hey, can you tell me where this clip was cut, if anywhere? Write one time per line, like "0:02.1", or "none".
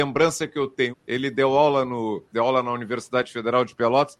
0:00.9
0:02.3